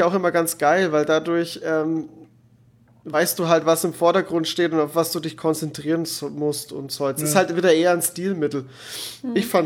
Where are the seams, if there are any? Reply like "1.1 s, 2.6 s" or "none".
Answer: none